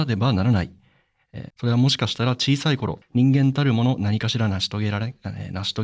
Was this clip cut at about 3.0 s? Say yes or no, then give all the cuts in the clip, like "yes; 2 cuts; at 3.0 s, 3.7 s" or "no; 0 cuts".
yes; 2 cuts; at 1.5 s, 3.0 s